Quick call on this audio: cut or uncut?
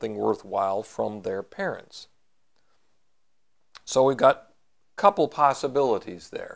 uncut